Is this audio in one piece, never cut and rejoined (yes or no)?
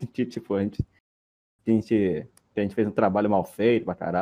yes